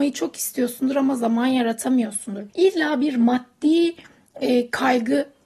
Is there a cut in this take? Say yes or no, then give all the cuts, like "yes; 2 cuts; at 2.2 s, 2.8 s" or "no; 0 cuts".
yes; 1 cut; at 2.5 s